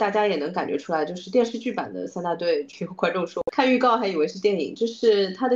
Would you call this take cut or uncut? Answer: uncut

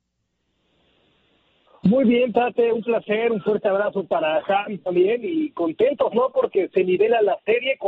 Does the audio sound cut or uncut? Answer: uncut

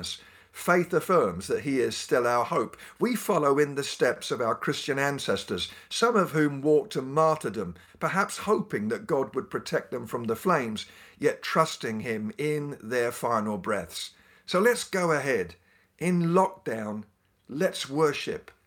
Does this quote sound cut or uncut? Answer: uncut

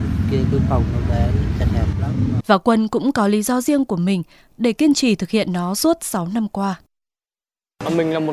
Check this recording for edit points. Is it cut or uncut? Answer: cut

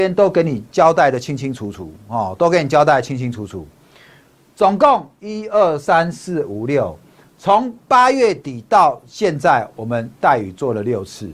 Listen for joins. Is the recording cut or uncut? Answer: uncut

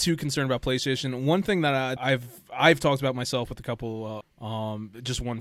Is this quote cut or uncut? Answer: cut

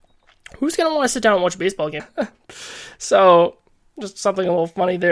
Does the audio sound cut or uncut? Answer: cut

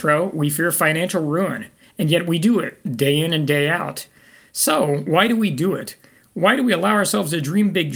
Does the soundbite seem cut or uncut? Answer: cut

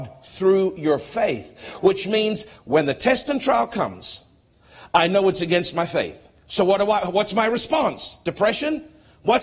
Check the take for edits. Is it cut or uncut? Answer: uncut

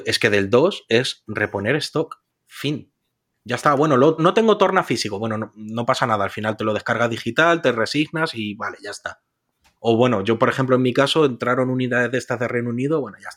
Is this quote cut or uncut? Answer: cut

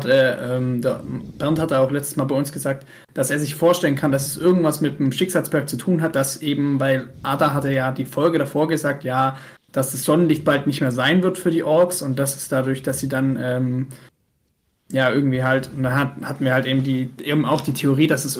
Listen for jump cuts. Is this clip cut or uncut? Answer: uncut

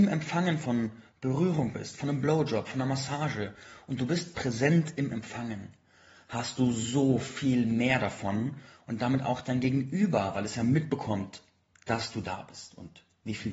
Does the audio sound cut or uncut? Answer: uncut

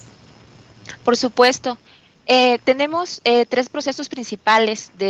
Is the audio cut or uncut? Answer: uncut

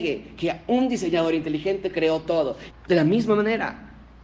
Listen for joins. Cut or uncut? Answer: cut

